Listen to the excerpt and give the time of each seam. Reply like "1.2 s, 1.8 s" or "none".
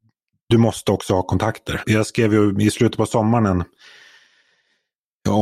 1.8 s